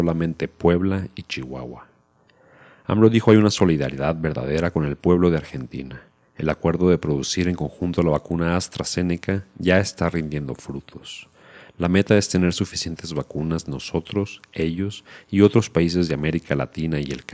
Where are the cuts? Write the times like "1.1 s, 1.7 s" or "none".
none